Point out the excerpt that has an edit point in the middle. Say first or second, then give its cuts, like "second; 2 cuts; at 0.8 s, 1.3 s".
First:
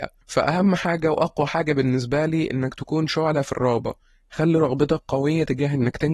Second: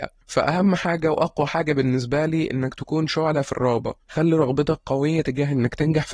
second; 1 cut; at 4.0 s